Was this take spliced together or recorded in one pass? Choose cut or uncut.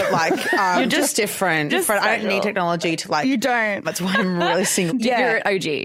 cut